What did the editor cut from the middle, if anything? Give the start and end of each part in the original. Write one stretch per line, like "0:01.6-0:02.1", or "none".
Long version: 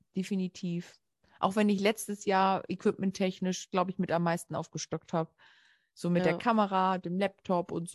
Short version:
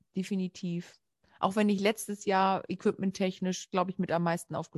none